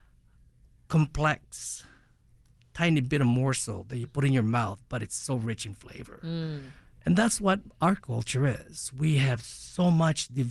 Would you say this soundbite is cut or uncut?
uncut